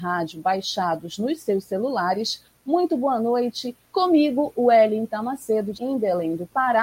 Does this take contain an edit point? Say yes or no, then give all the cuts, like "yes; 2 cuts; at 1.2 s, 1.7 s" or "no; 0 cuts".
yes; 2 cuts; at 3.8 s, 5.8 s